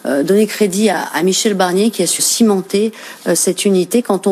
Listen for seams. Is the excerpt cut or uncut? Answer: cut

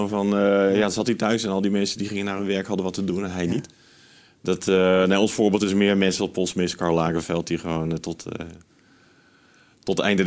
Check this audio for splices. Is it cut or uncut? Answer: uncut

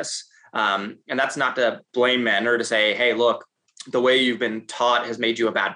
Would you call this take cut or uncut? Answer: uncut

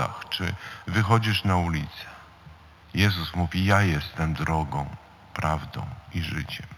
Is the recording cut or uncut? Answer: uncut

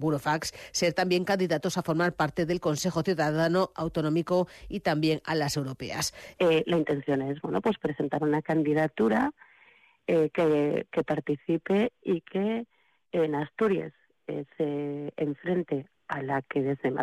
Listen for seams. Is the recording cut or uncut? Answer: cut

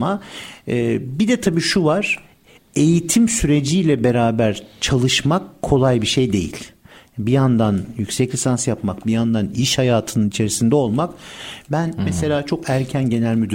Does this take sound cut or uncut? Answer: cut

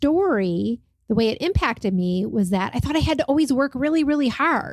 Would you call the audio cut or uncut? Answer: uncut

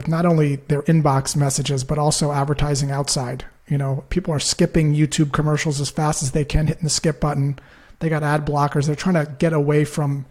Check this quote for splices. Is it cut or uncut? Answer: uncut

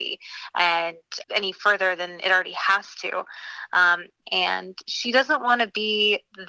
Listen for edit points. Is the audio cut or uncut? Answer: cut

